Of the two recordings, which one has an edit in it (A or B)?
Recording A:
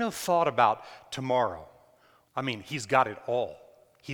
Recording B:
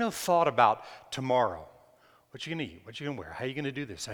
A